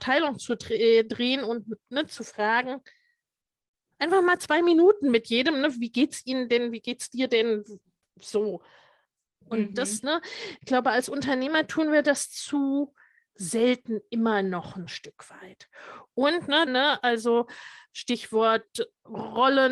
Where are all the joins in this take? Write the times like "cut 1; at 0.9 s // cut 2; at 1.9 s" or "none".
cut 1; at 9.4 s // cut 2; at 16.7 s